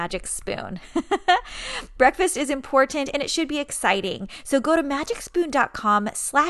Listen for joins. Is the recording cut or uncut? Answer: uncut